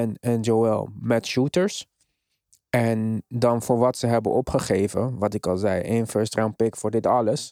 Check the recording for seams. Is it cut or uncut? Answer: uncut